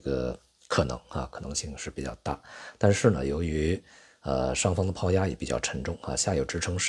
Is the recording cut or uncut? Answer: uncut